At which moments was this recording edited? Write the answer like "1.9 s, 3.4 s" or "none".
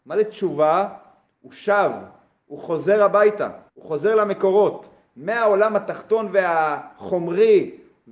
3.7 s